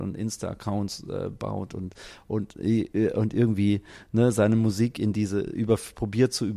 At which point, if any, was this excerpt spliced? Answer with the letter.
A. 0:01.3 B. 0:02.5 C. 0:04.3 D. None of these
D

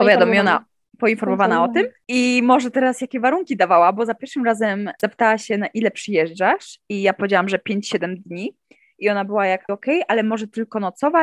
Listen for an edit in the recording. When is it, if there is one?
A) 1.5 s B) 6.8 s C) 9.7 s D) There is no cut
C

